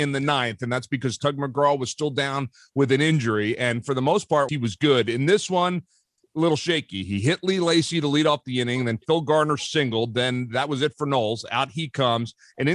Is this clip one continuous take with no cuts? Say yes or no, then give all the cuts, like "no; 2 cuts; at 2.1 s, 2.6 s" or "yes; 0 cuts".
no; 1 cut; at 4.5 s